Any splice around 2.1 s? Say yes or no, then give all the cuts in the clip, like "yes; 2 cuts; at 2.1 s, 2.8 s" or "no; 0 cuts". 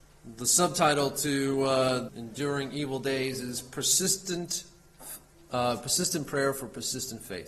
yes; 1 cut; at 2.1 s